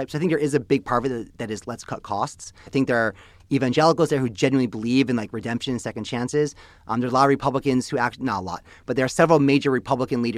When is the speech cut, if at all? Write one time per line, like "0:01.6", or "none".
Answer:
0:02.7